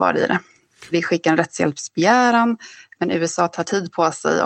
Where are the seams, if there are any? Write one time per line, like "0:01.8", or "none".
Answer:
0:00.9